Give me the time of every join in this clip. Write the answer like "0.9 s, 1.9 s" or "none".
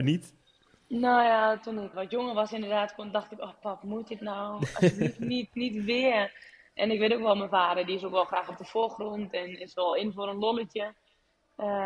1.9 s